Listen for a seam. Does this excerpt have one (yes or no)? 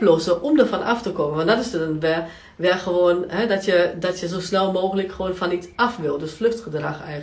no